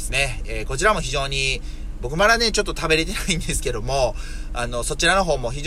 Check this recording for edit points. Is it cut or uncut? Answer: uncut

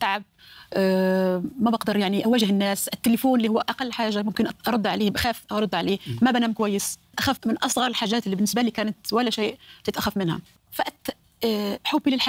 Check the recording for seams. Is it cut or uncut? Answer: cut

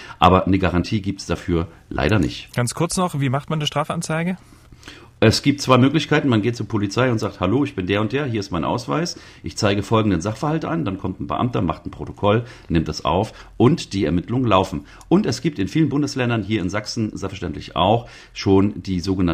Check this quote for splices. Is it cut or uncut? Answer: uncut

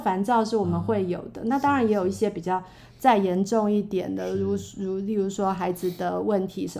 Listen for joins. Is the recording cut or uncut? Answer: uncut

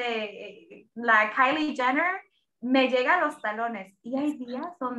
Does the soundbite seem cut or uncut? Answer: uncut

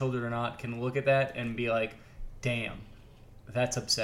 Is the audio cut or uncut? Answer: uncut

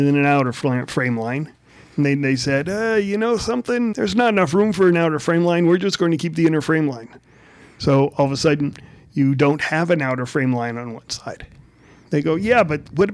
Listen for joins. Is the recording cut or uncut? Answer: cut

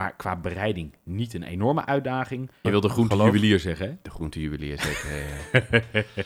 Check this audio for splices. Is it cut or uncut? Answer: cut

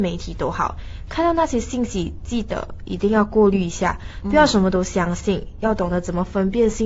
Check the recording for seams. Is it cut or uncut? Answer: uncut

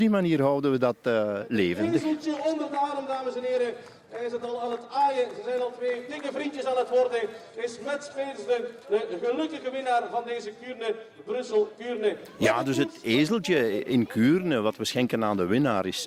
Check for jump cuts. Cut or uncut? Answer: uncut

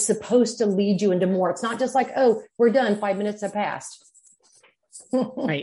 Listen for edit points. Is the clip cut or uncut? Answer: uncut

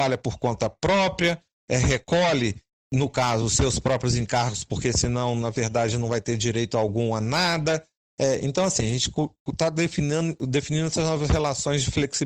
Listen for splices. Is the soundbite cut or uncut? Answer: uncut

